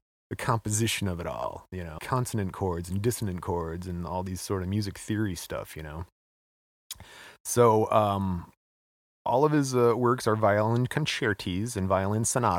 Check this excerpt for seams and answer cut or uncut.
cut